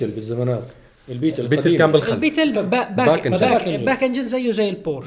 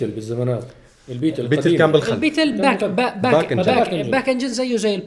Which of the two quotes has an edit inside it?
first; 1 cut; at 2.5 s

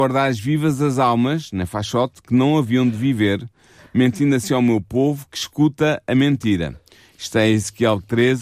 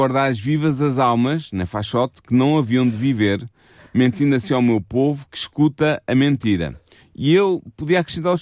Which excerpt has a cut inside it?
second; 1 cut; at 7.0 s

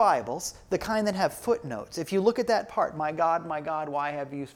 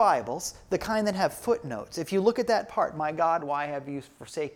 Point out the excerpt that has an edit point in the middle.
second; 1 cut; at 3.4 s

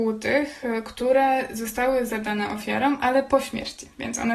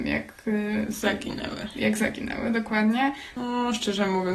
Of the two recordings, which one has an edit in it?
second; 1 cut; at 3.4 s

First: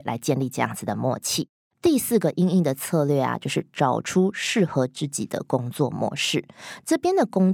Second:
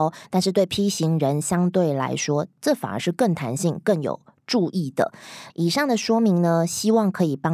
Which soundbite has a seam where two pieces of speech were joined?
second; 1 cut; at 5.5 s

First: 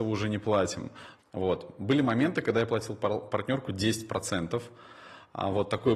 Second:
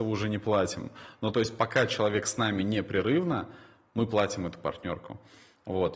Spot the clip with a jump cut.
first; 1 cut; at 1.2 s

